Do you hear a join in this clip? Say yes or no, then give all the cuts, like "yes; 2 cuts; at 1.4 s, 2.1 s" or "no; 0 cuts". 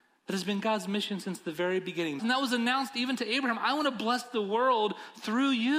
yes; 1 cut; at 2.2 s